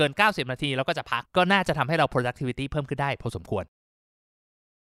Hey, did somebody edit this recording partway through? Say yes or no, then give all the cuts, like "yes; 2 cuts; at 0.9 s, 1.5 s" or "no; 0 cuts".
yes; 1 cut; at 1.2 s